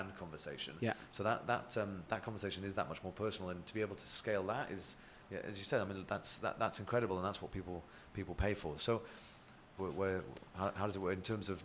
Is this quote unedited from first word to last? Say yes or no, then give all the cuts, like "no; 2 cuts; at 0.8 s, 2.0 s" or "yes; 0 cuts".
no; 1 cut; at 9.8 s